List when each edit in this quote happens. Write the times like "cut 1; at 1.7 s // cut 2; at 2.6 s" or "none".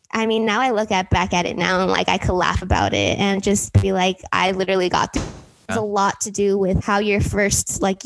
cut 1; at 5.7 s // cut 2; at 6.8 s

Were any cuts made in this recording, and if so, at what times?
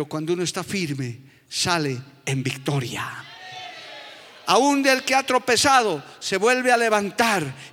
none

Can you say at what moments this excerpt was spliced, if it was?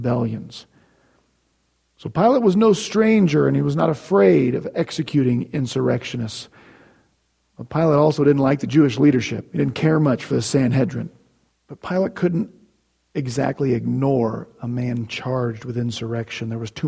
cut 1; at 11.5 s

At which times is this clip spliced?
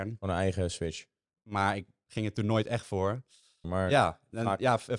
cut 1; at 1.2 s // cut 2; at 3.6 s

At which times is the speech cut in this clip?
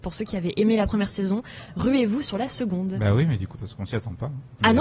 cut 1; at 3.5 s

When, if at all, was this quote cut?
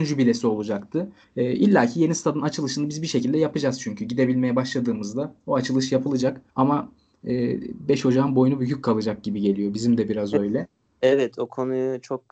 cut 1; at 1.2 s // cut 2; at 6.5 s

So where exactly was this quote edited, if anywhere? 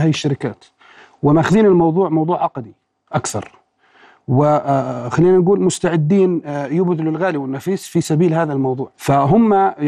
cut 1; at 8.9 s

